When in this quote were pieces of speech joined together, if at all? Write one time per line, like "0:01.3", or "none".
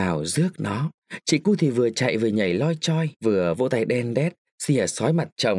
0:03.1

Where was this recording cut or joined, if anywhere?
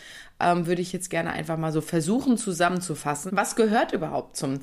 0:03.3

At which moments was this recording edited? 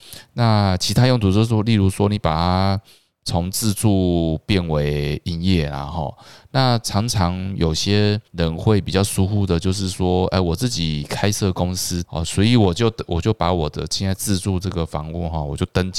0:08.3
0:12.0

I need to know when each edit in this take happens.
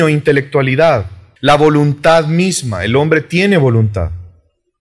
0:01.4

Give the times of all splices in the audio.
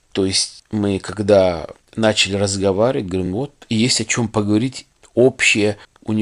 none

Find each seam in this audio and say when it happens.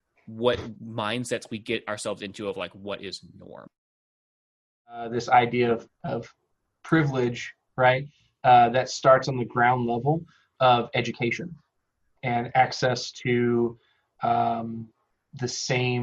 0:05.9

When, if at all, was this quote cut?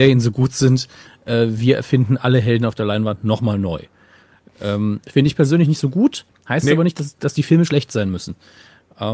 none

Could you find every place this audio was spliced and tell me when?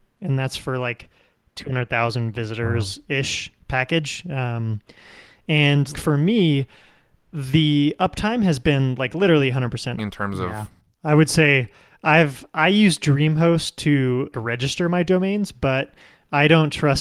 0:05.9
0:10.0
0:14.3

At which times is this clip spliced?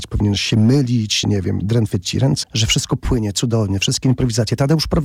0:01.2
0:02.4

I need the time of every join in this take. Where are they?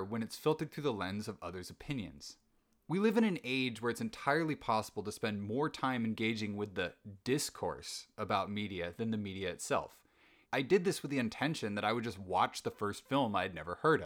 0:10.4

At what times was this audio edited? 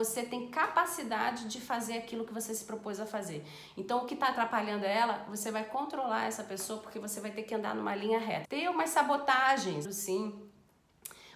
0:08.4
0:09.8

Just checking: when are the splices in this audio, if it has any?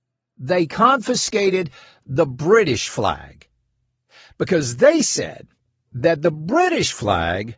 none

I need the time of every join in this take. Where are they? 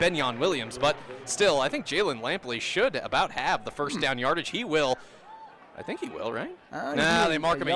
none

